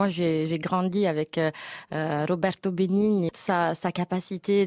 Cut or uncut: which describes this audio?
uncut